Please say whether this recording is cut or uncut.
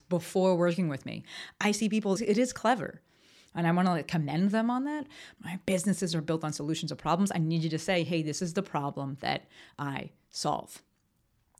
cut